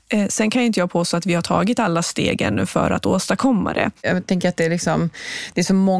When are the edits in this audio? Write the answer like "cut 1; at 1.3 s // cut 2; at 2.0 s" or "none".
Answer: none